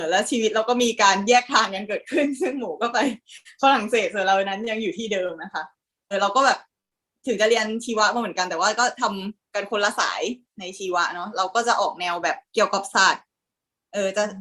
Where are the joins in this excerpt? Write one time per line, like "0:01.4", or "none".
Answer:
0:06.1
0:12.4